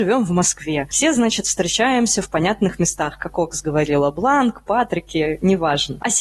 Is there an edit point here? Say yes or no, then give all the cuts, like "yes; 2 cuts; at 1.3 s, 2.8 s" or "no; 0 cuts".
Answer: no; 0 cuts